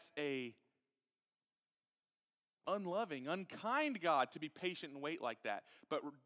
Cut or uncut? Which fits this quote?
uncut